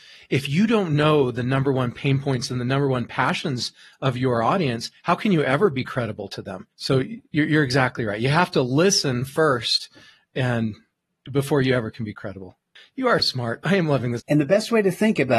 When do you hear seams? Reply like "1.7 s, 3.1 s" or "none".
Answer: 6.7 s, 13.2 s, 14.2 s